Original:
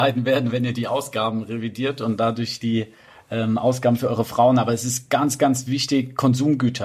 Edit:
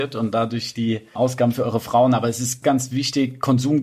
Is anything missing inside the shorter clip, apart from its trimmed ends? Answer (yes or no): yes